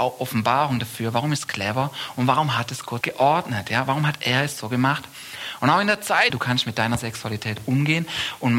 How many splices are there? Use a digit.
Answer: 2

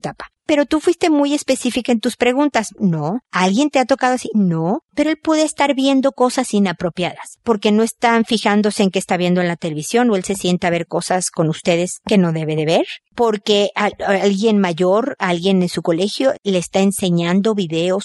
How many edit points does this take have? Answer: 1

